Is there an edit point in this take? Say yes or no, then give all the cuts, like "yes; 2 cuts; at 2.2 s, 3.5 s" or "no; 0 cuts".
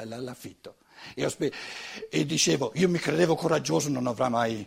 no; 0 cuts